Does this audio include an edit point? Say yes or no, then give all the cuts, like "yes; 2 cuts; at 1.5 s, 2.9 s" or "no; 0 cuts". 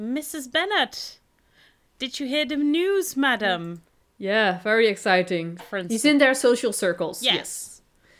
yes; 1 cut; at 5.6 s